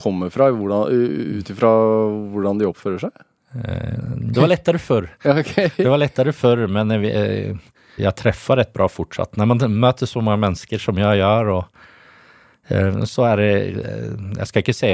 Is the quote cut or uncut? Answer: cut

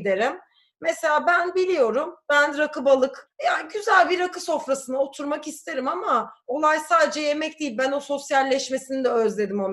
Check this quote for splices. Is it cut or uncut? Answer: cut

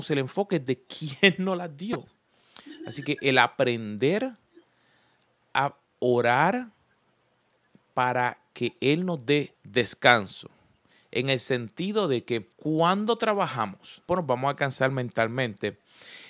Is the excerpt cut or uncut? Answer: cut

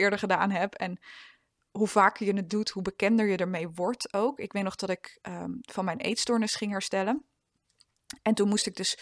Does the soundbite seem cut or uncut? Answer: uncut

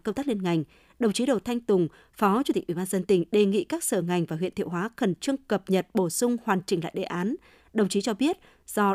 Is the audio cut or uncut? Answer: uncut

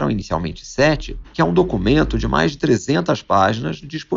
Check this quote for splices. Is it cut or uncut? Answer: cut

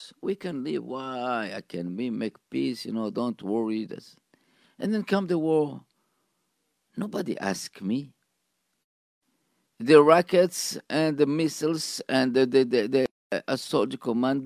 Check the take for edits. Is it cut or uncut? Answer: uncut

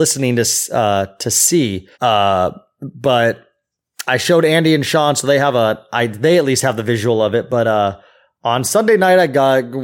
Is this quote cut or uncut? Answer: cut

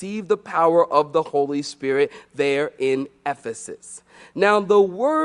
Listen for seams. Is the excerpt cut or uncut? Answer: uncut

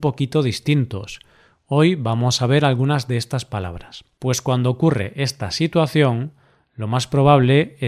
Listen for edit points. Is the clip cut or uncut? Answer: cut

